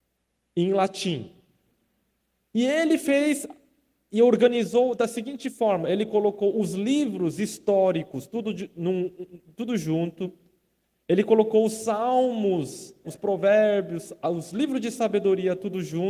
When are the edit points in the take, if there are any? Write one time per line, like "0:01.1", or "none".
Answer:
0:13.0